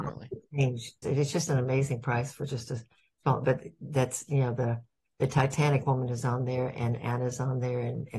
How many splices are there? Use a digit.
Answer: 1